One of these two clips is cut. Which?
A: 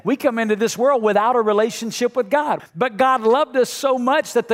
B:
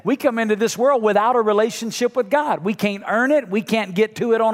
A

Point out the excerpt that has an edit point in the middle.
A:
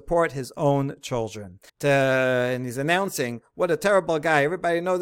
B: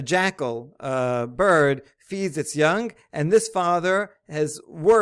A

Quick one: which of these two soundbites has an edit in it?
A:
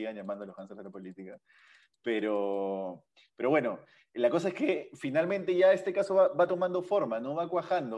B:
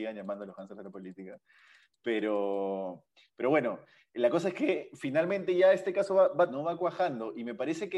B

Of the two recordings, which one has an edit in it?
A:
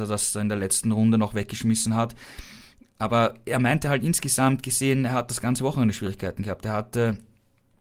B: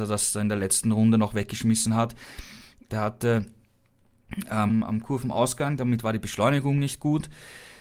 B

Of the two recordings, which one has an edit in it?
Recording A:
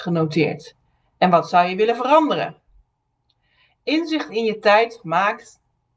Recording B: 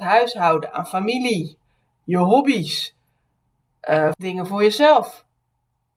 B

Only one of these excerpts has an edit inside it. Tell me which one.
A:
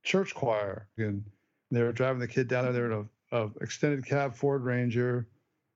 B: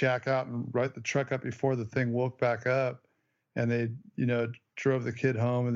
A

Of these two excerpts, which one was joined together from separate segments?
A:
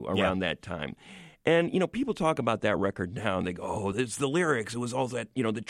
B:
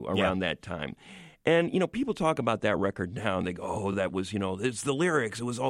A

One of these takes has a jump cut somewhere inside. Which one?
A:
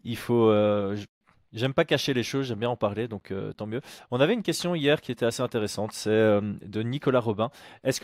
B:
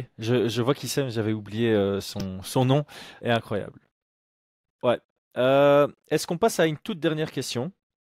B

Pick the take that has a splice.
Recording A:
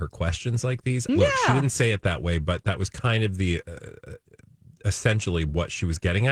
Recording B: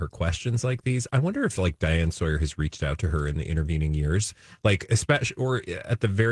A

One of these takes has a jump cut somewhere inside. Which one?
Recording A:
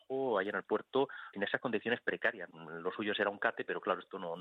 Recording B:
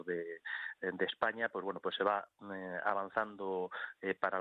A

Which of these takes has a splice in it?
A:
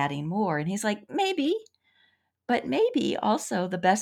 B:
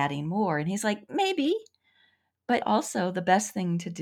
B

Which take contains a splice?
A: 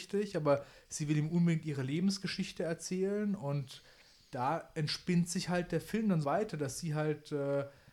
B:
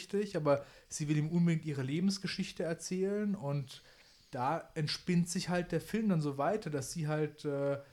A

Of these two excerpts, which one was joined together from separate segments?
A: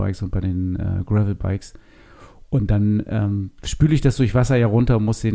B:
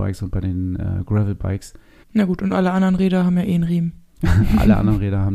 B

